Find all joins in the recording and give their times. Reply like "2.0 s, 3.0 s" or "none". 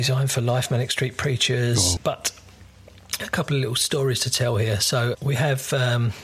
2.0 s, 5.1 s